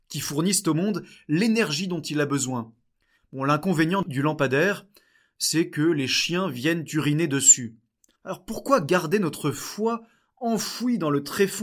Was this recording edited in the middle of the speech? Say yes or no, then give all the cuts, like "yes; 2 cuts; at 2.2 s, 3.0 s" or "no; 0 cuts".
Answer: yes; 2 cuts; at 3.2 s, 8.1 s